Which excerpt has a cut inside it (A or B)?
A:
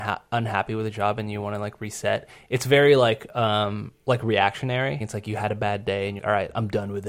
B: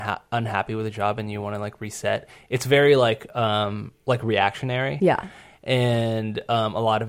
A